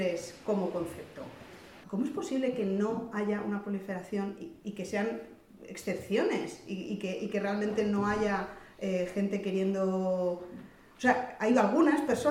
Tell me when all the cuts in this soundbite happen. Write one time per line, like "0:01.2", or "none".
0:01.8

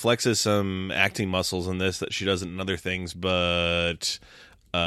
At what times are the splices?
none

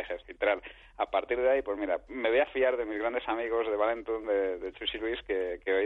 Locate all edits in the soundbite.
0:02.1

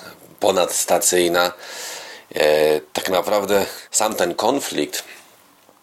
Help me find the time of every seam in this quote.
0:03.9

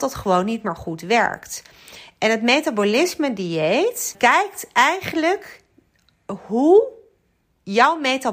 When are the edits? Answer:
0:04.1

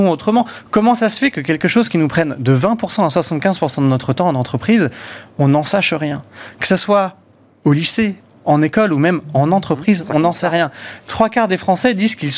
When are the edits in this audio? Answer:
none

